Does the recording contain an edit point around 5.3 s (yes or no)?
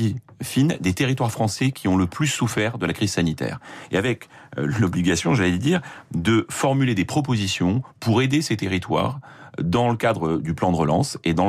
no